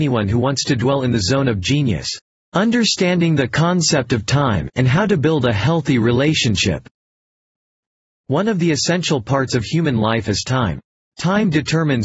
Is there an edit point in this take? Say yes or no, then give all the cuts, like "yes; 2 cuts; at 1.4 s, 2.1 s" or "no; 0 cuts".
yes; 1 cut; at 2.3 s